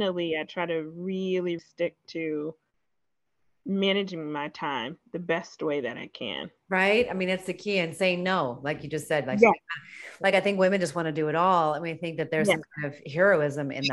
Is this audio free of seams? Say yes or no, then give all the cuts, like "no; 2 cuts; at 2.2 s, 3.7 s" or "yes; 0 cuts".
no; 1 cut; at 1.6 s